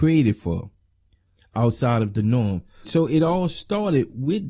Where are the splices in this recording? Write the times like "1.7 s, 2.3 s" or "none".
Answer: 1.4 s, 2.8 s